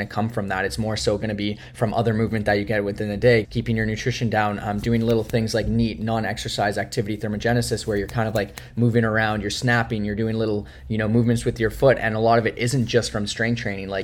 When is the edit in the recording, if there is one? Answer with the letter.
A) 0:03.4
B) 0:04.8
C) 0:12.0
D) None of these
A